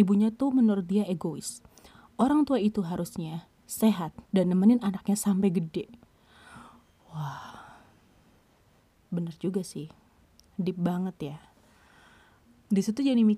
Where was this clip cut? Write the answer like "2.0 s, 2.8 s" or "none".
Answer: 4.3 s